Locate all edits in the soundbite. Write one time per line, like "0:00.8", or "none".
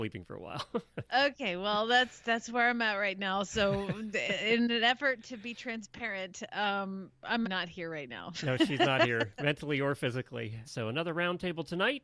0:07.4
0:10.6